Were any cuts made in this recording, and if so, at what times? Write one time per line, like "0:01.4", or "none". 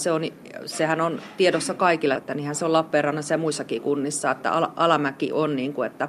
0:02.2